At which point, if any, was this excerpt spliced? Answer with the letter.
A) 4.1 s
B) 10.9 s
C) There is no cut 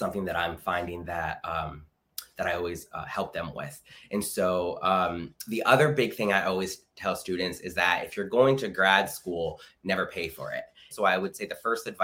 B